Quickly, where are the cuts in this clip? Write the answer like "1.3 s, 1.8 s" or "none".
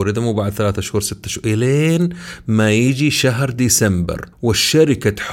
4.3 s